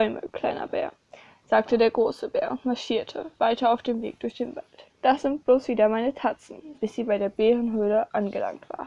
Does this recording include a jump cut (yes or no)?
yes